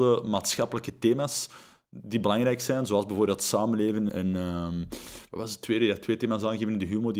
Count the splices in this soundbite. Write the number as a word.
one